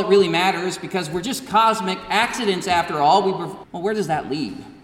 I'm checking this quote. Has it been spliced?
yes; 1 cut; at 3.6 s

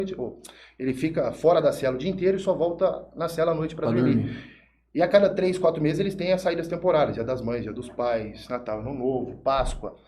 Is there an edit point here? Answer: no; 0 cuts

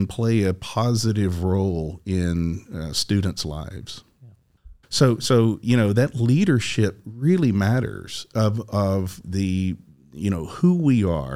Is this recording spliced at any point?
yes; 2 cuts; at 4.8 s, 9.2 s

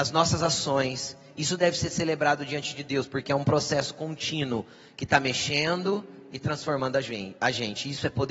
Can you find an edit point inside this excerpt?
no; 0 cuts

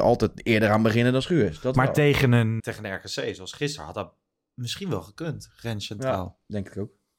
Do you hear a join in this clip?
yes; 1 cut; at 2.6 s

